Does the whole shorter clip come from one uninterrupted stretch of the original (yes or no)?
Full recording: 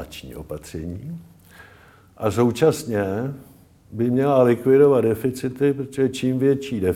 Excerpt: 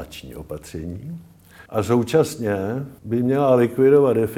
no